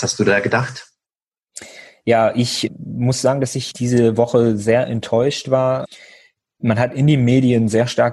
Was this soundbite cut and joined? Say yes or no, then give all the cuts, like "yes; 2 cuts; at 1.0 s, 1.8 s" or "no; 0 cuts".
no; 0 cuts